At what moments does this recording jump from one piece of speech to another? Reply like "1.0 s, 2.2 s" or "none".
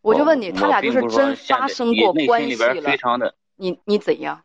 none